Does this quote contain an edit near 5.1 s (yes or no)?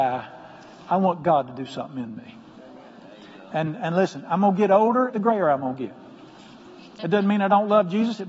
yes